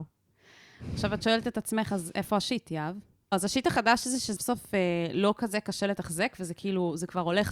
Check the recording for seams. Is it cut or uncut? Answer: cut